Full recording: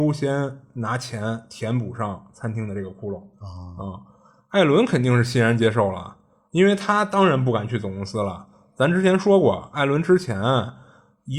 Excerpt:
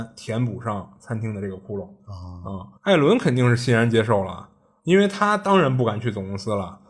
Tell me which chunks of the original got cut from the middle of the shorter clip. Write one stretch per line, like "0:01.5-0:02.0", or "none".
0:04.1-0:04.4

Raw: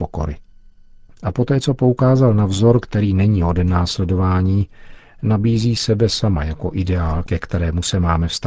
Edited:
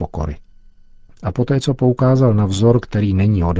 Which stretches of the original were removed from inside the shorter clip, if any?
none

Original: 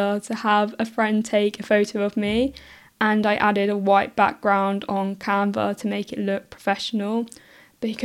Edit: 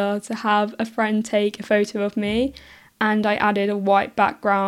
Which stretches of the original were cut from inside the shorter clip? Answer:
none

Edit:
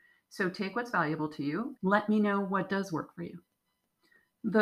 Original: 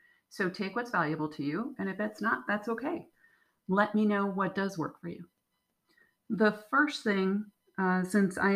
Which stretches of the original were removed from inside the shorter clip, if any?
0:01.8-0:03.6

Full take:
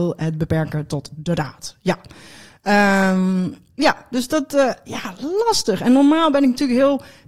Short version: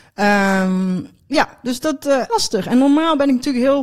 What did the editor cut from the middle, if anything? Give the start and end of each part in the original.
0:04.8-0:05.4

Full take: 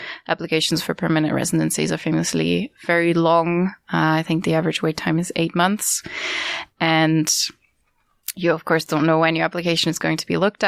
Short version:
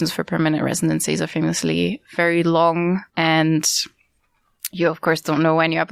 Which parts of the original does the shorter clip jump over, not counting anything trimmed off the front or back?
0:03.8-0:06.7

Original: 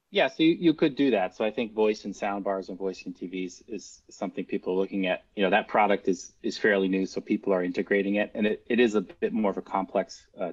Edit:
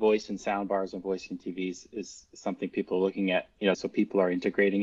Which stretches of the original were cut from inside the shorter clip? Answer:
0:05.5-0:07.1

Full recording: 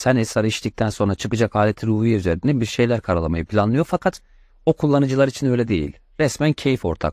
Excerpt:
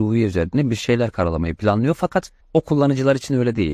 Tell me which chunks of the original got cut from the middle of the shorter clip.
0:04.3-0:04.5

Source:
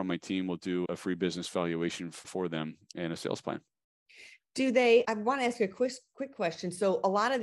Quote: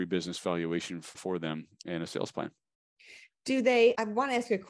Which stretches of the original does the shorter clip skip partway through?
none

